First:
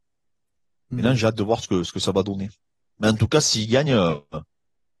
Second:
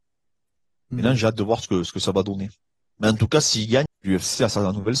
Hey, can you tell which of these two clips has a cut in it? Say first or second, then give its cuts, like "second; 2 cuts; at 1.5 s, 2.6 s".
second; 1 cut; at 3.9 s